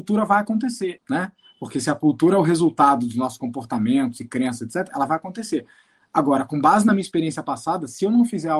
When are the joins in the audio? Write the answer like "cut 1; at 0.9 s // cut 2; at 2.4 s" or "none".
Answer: cut 1; at 1.0 s